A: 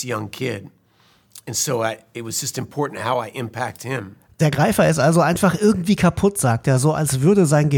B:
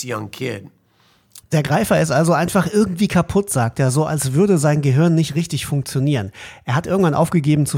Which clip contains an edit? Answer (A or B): B